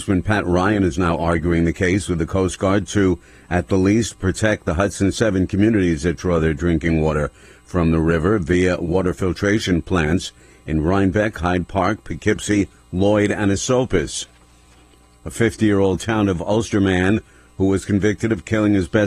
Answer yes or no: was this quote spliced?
no